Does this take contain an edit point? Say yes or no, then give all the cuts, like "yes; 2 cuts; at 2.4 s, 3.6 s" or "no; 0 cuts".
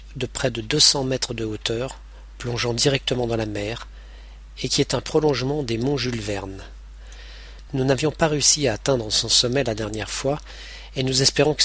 no; 0 cuts